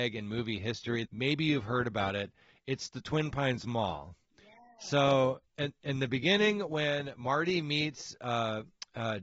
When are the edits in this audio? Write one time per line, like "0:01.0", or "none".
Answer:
0:01.1
0:05.5